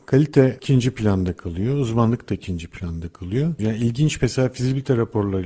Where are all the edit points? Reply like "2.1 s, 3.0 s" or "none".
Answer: 3.6 s